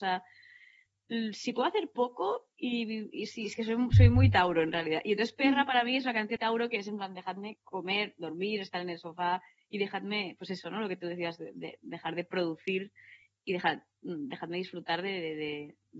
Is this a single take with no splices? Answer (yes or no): no